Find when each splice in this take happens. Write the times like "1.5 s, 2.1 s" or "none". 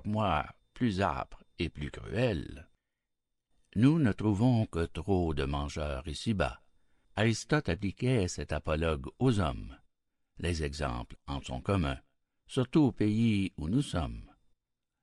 7.0 s